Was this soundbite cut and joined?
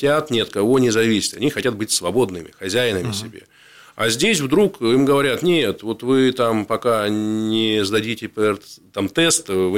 no; 0 cuts

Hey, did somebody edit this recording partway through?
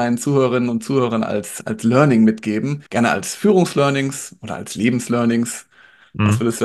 yes; 1 cut; at 2.9 s

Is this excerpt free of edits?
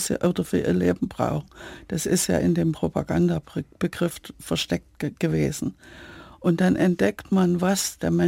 yes; 0 cuts

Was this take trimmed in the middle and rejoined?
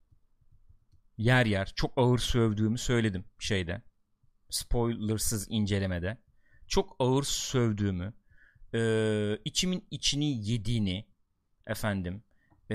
no; 0 cuts

